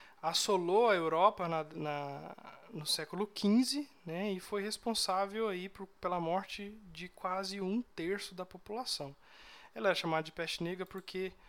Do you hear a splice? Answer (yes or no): no